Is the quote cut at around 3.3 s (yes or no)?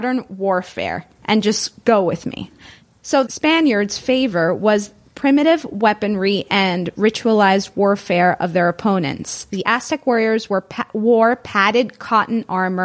yes